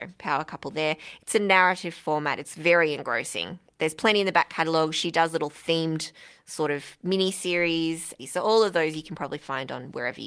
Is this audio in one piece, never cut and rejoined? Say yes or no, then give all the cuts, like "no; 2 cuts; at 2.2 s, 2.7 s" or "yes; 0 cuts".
no; 1 cut; at 8.2 s